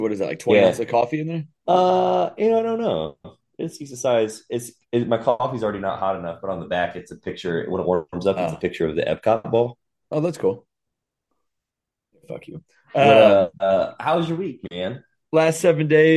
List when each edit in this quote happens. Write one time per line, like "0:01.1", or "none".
0:12.1